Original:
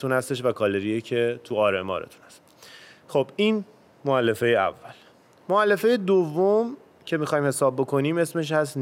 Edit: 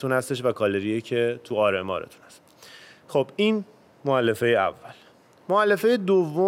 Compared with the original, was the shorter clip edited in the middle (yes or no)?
no